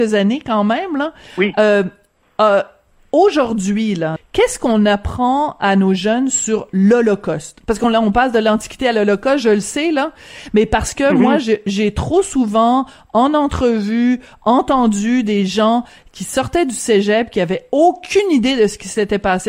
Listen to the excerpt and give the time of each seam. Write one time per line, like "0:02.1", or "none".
0:04.2